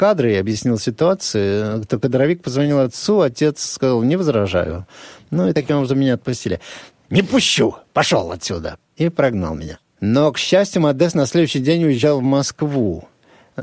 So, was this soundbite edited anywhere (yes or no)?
yes